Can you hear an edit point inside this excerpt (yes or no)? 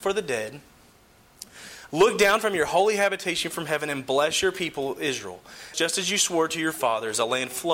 yes